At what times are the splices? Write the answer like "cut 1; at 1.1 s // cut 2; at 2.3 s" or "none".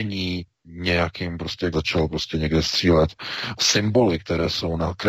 cut 1; at 1.7 s // cut 2; at 3.6 s